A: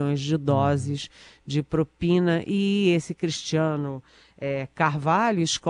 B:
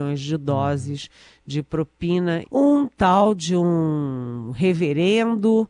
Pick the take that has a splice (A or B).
B